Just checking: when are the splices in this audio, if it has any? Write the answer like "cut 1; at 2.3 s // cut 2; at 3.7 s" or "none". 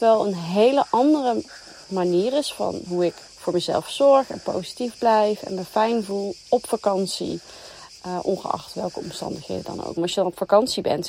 cut 1; at 3.3 s // cut 2; at 10.0 s